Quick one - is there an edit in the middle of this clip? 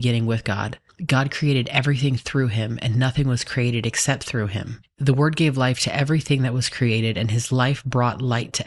no; 0 cuts

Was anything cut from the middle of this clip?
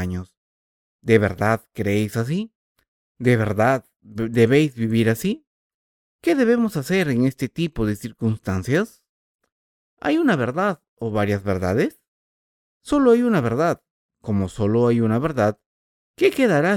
yes; 1 cut; at 9.8 s

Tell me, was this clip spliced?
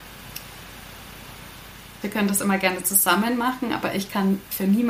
yes; 1 cut; at 2.0 s

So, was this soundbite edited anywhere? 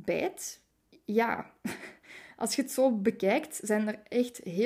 yes; 1 cut; at 0.9 s

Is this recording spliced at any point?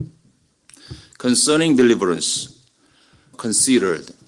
yes; 1 cut; at 3.3 s

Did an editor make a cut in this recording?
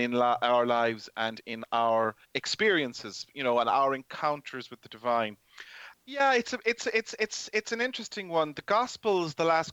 yes; 2 cuts; at 2.2 s, 5.9 s

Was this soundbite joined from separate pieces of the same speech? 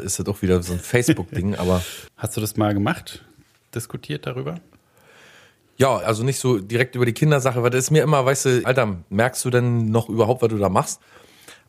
yes; 3 cuts; at 2.1 s, 6.0 s, 8.6 s

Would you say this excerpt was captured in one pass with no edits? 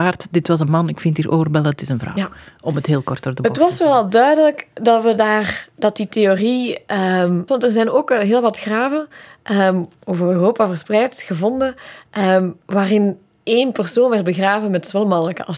no; 1 cut; at 7.5 s

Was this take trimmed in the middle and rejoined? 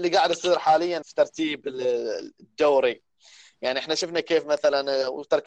yes; 1 cut; at 1.0 s

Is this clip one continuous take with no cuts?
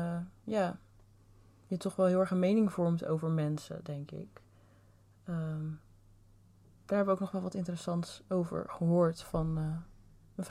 yes; 0 cuts

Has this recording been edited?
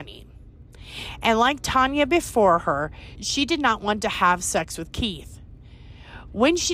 yes; 1 cut; at 3.2 s

